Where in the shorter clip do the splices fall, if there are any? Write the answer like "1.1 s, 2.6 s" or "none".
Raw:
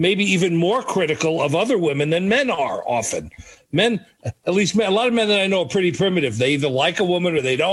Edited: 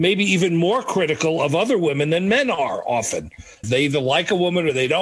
3.6 s

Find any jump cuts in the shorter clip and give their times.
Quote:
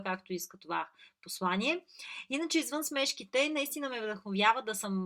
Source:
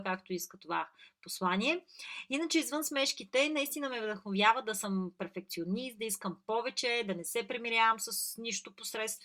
none

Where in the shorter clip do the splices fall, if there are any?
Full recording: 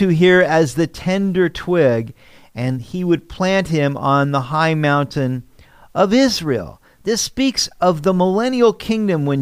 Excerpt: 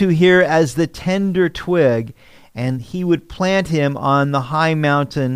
none

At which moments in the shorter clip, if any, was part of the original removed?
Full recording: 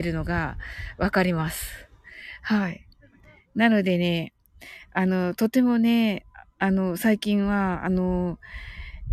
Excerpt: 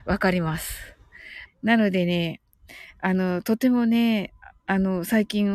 1.5 s

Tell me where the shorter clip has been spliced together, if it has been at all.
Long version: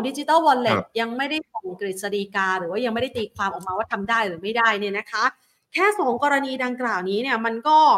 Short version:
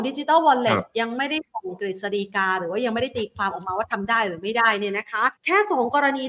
5.4 s

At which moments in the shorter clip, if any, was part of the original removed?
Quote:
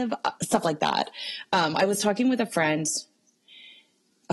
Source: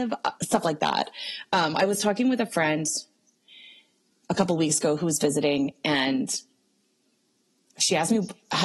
none

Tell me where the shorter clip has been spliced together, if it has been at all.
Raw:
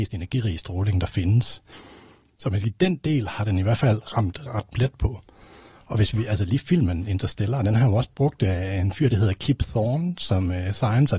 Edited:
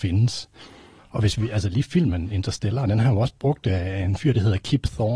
1.0 s

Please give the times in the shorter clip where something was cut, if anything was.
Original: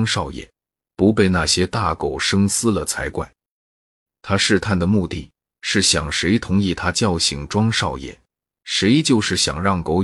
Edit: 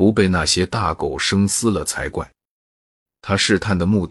none

